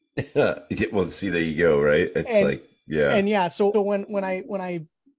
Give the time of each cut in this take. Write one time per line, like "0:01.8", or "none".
0:03.7